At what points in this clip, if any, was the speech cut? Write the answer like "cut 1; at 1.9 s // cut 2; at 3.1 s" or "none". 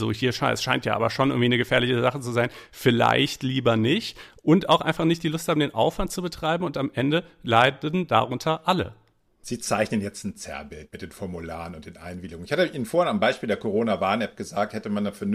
none